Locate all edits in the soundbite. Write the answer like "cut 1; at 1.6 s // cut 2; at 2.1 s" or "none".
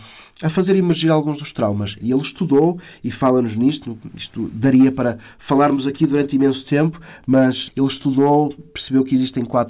cut 1; at 2.0 s // cut 2; at 7.7 s